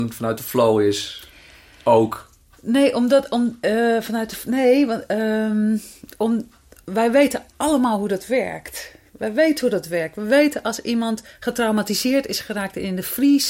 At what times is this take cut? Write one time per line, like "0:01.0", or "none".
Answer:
none